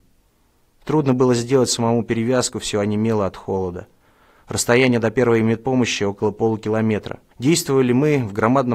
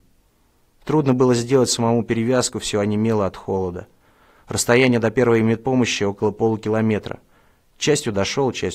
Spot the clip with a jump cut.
first; 1 cut; at 7.3 s

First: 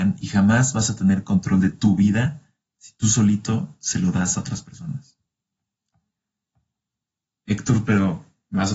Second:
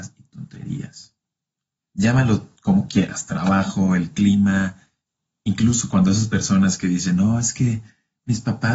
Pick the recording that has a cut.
second; 1 cut; at 1.8 s

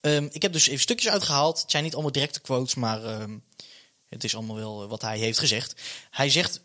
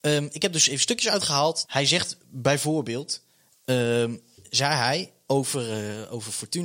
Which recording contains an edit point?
second; 1 cut; at 1.6 s

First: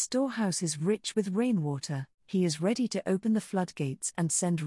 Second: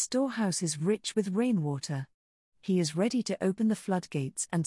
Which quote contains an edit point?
first; 1 cut; at 2.2 s

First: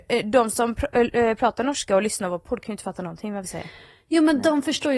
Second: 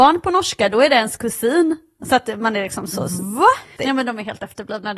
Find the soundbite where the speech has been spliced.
second; 1 cut; at 3.8 s

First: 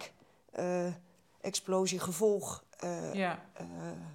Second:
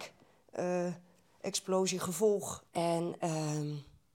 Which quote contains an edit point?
second; 1 cut; at 2.7 s

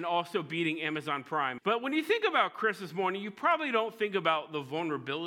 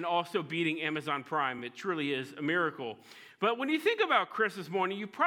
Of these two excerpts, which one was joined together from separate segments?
first; 1 cut; at 1.6 s

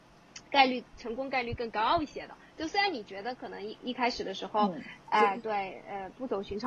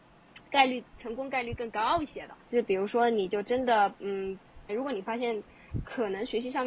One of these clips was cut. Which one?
second; 2 cuts; at 2.4 s, 4.7 s

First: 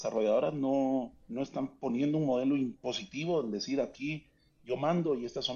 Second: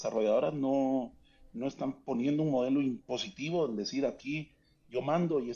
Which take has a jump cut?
first; 1 cut; at 1.2 s

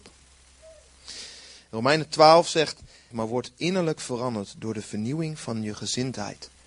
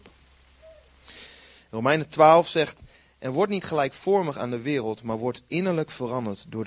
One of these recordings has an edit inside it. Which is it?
first; 1 cut; at 3.1 s

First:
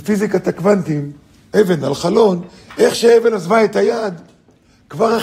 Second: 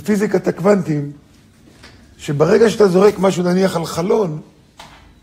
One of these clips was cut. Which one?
first; 1 cut; at 1.5 s

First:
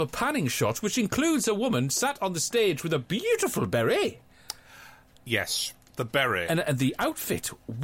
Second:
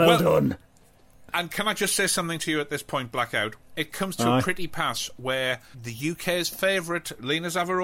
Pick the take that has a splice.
second; 1 cut; at 5.7 s

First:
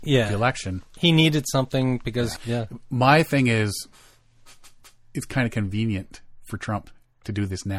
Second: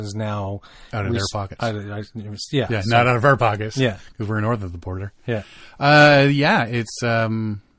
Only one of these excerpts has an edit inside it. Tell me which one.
first; 1 cut; at 2.4 s

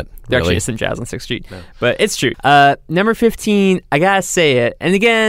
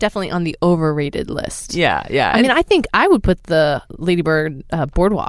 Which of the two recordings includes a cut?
first; 1 cut; at 2.3 s

